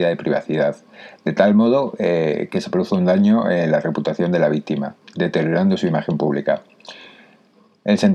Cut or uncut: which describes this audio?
uncut